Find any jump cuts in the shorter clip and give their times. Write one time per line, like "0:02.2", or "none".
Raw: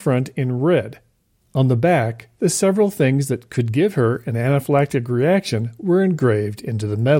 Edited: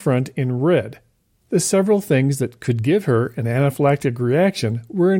0:01.5